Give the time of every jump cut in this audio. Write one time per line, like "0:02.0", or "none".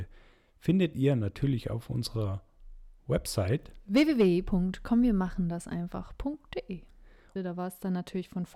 0:07.4